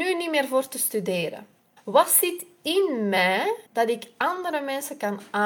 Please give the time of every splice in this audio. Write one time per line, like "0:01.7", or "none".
0:01.8
0:03.7